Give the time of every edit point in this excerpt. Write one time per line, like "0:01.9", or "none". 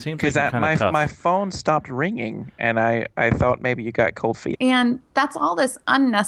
0:04.5